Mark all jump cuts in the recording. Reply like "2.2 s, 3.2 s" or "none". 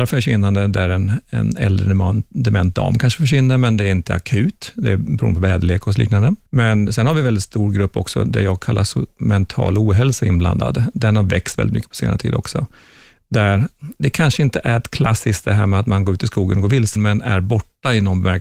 6.4 s, 17.0 s